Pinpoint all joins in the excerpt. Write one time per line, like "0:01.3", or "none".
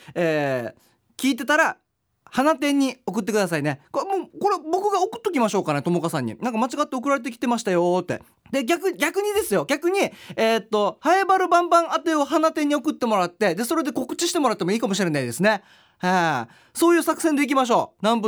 0:08.3